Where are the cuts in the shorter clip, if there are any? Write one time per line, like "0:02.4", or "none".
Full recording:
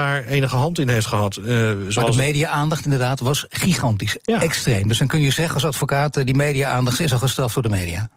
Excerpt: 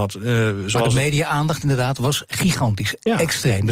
none

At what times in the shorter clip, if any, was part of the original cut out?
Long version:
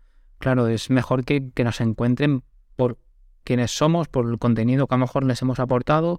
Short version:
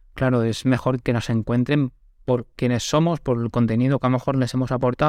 0:01.0
0:02.5

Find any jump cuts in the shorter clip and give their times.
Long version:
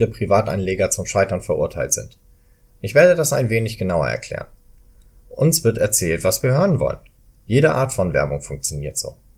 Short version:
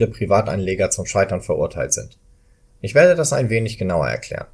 none

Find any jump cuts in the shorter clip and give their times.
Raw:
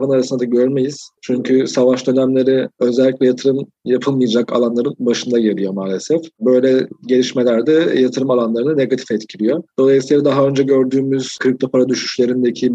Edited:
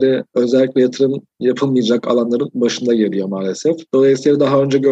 0:03.9

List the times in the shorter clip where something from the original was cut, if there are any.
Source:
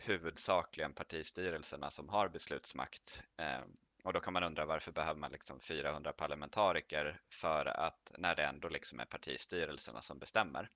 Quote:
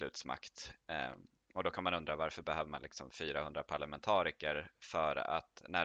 none

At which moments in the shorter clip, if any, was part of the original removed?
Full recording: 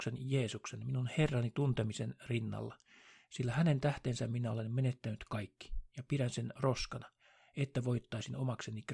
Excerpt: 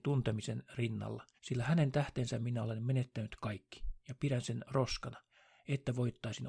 0:01.4

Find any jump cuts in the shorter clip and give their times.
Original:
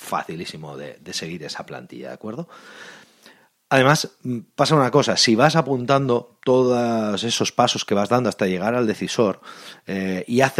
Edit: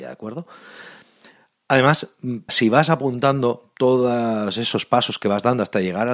0:02.5

